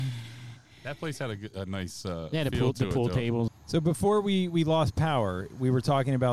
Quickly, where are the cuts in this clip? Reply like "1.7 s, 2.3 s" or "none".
3.5 s